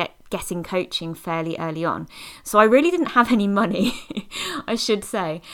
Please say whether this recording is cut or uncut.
uncut